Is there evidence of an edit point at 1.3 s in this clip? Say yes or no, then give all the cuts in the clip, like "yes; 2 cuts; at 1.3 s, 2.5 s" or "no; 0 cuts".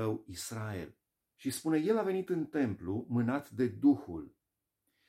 yes; 1 cut; at 1.3 s